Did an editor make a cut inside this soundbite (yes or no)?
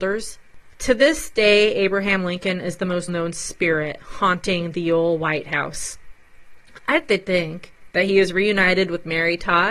yes